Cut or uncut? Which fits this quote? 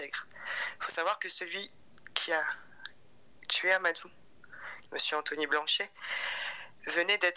cut